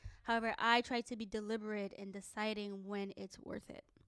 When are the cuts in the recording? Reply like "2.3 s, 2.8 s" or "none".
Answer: none

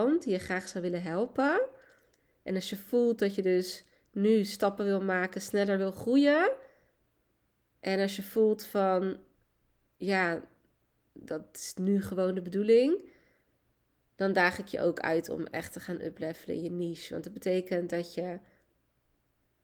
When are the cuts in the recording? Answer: none

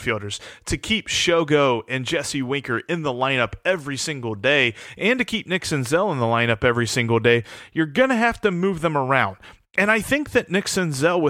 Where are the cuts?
none

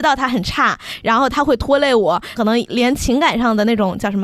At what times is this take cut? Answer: 2.3 s

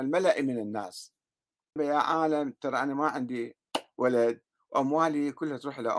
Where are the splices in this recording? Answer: 1.8 s

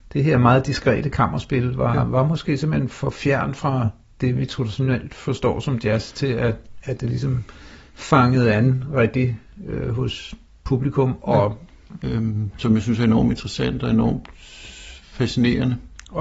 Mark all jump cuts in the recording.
12.0 s

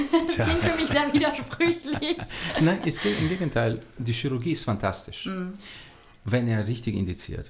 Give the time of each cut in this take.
none

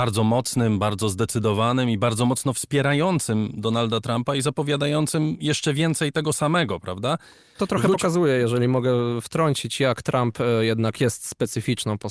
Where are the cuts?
7.6 s

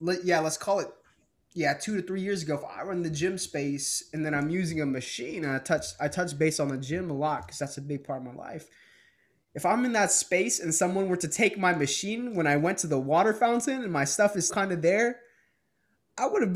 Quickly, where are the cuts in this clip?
14.5 s

